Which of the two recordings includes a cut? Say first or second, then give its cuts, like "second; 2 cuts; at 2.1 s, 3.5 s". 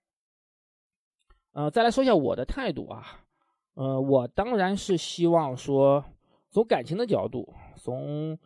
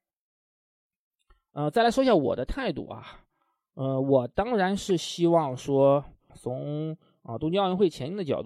second; 1 cut; at 6.3 s